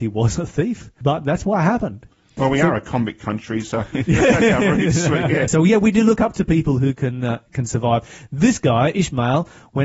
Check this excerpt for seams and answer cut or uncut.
cut